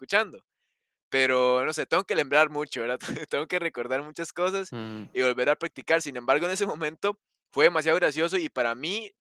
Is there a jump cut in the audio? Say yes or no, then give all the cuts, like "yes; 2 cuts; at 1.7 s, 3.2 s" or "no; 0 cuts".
no; 0 cuts